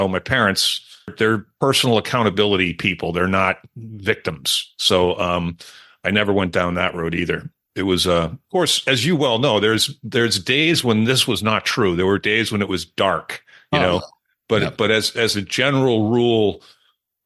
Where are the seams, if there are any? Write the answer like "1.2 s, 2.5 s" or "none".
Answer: none